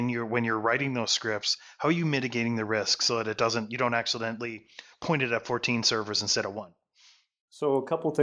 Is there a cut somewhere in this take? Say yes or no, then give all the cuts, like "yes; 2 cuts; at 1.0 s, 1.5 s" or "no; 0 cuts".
no; 0 cuts